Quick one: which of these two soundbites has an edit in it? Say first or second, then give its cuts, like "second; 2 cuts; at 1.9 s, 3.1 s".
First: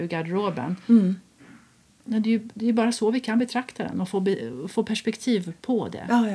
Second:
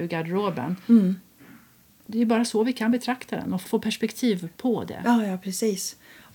second; 2 cuts; at 2.1 s, 3.7 s